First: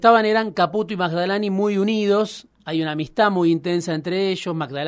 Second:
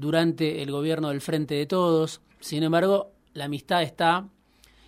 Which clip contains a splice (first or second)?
second